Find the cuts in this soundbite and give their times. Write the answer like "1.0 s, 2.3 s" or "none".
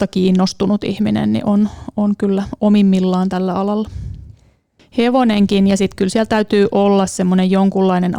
4.8 s